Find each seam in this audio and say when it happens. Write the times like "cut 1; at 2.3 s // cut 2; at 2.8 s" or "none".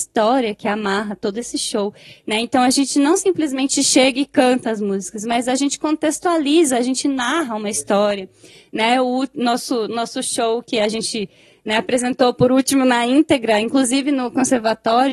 none